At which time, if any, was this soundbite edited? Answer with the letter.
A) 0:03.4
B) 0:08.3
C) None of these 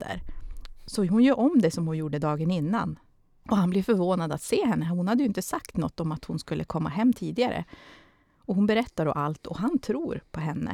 A